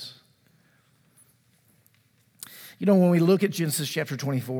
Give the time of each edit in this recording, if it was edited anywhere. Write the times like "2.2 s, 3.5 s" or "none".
none